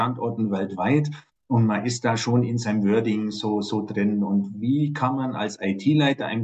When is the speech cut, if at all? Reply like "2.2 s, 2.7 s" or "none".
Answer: none